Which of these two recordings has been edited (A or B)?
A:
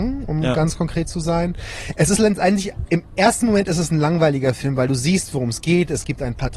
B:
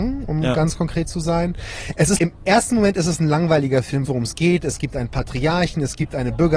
B